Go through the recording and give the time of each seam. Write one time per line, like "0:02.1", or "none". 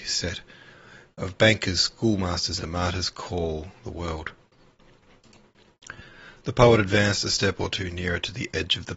0:02.6